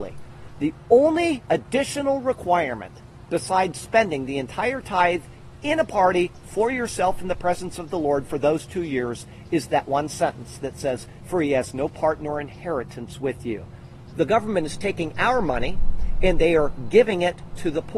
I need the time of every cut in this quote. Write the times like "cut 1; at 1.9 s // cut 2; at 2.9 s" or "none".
cut 1; at 11.2 s // cut 2; at 14.1 s